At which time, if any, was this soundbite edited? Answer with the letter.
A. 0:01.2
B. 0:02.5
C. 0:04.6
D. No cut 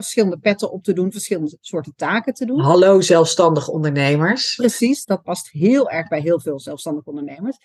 D